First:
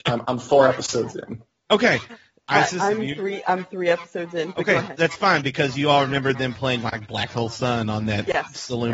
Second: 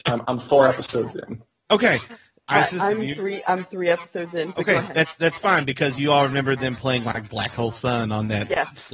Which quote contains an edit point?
first; 1 cut; at 4.9 s

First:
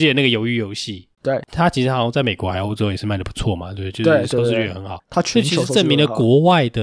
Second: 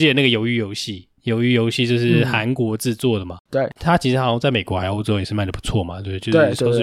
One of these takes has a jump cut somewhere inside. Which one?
first; 1 cut; at 1.1 s

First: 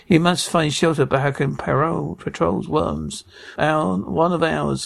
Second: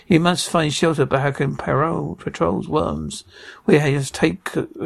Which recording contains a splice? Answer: first; 1 cut; at 3.6 s

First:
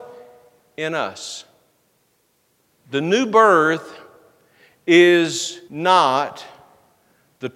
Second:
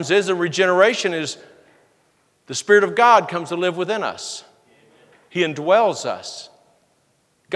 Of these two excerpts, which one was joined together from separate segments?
first; 2 cuts; at 2.7 s, 5.7 s

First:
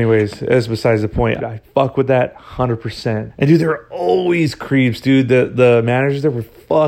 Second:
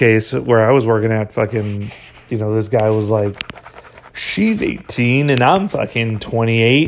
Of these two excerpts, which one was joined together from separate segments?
first; 2 cuts; at 1.4 s, 3.3 s

